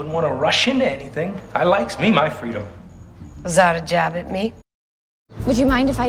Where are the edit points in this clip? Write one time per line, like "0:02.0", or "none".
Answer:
none